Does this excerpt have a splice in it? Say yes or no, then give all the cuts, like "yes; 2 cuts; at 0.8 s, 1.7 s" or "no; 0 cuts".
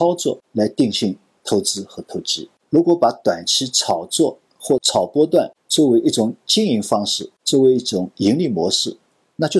no; 0 cuts